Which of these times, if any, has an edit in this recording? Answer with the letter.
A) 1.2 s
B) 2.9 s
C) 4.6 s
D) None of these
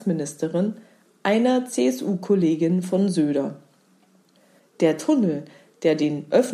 C